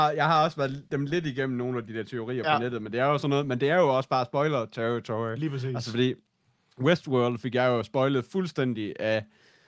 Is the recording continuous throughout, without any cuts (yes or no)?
yes